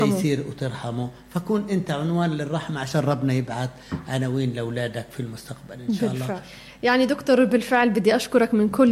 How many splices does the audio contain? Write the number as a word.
one